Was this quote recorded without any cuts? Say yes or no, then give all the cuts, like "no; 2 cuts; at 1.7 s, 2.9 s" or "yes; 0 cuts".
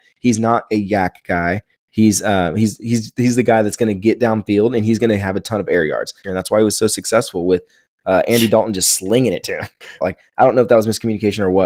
no; 2 cuts; at 6.2 s, 10.0 s